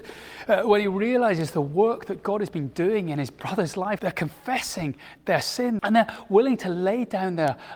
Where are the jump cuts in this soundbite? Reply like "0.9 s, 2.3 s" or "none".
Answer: 4.0 s, 5.8 s

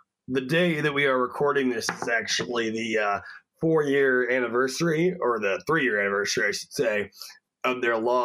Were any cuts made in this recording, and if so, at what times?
none

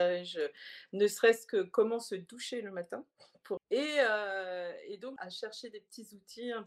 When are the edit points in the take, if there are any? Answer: 3.6 s, 5.2 s

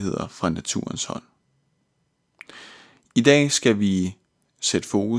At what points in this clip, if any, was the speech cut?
none

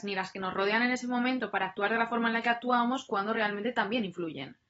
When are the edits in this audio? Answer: none

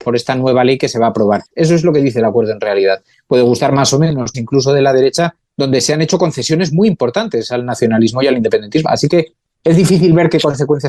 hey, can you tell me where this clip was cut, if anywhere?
1.5 s, 4.3 s, 8.8 s

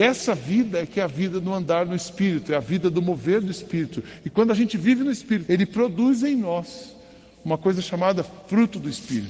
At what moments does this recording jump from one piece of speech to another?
5.5 s

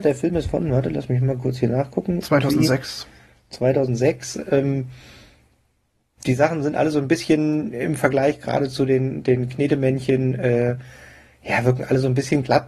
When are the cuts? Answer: none

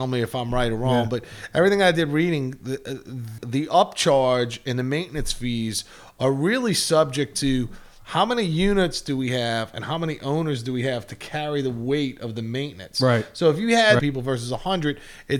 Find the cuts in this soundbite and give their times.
3.4 s, 14.0 s

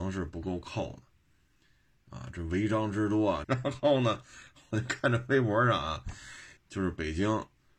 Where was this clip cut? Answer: 3.4 s, 6.6 s

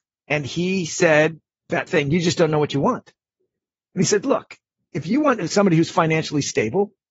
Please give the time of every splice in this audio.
1.9 s

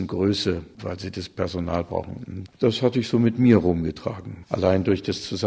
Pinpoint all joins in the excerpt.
2.5 s, 4.4 s

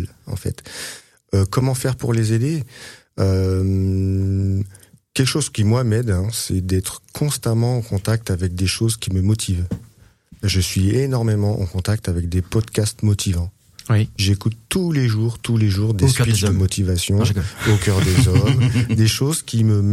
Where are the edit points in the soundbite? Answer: none

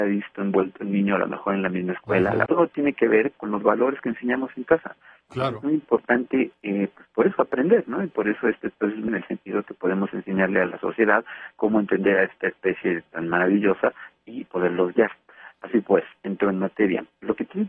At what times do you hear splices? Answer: 2.5 s, 9.1 s

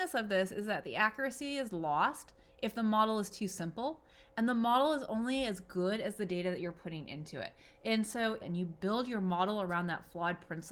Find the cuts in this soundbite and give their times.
8.4 s

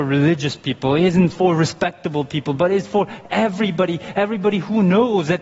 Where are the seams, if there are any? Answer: none

